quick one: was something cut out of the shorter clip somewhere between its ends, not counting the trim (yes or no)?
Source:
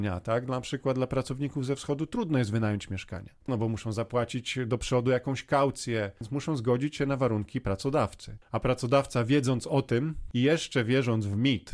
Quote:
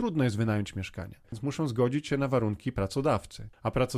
yes